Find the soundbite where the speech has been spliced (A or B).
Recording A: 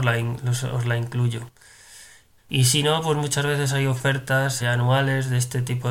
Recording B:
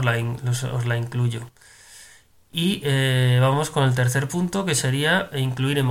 A